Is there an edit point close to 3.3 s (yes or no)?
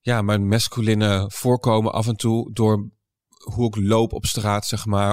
no